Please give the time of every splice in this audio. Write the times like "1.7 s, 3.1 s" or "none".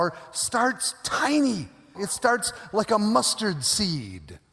2.0 s